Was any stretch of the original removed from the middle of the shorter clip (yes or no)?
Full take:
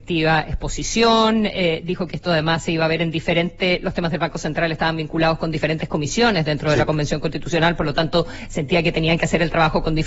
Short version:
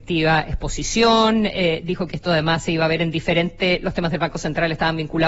no